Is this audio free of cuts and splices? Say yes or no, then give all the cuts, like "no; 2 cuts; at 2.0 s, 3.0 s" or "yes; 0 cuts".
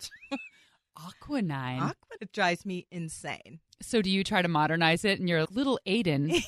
no; 2 cuts; at 2.2 s, 5.4 s